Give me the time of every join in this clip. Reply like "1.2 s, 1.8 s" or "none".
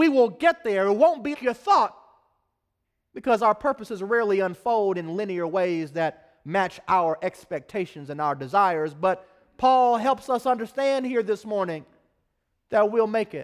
1.3 s

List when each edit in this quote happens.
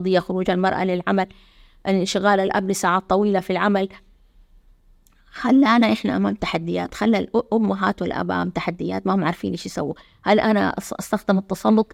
none

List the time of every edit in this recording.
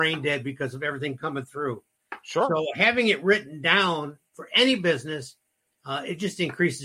none

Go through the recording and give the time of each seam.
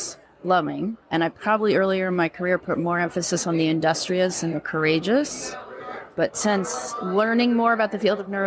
1.0 s

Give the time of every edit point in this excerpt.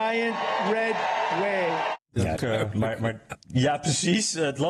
2.4 s

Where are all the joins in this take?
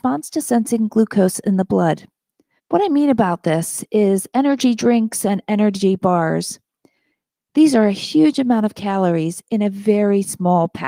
2.6 s

